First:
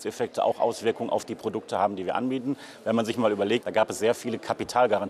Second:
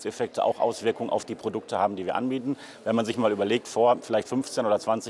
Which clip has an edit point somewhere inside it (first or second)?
first